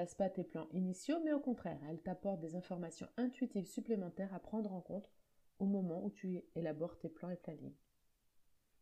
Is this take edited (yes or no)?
no